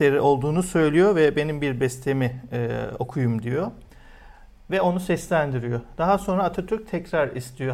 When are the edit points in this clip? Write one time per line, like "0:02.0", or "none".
none